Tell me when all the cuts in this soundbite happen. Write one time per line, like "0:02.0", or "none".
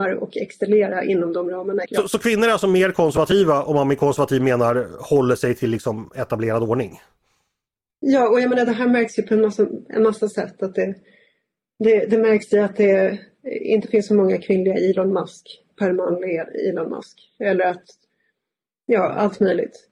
0:01.9